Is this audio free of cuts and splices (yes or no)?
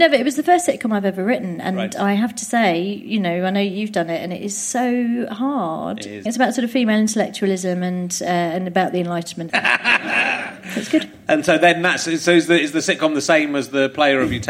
no